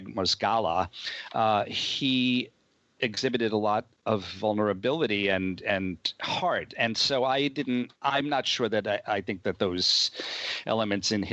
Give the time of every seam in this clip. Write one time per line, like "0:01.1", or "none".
0:08.0